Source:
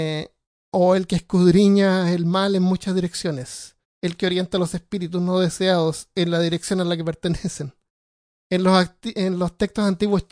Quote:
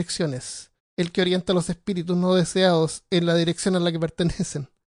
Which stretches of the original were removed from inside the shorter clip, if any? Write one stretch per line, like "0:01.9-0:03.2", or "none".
none